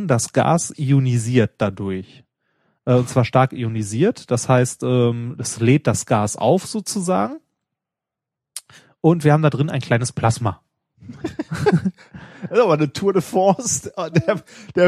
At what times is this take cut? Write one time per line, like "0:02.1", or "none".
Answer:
none